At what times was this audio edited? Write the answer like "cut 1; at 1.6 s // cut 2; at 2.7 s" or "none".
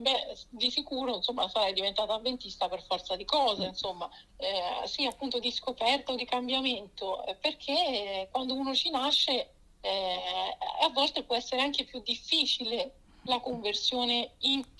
cut 1; at 4.3 s // cut 2; at 5.4 s